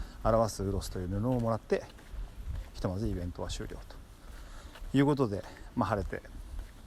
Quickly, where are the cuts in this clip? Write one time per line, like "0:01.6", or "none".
none